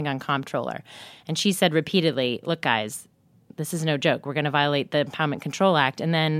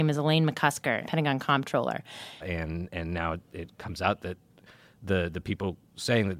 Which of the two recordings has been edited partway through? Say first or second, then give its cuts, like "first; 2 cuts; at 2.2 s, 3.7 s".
second; 2 cuts; at 1.0 s, 2.4 s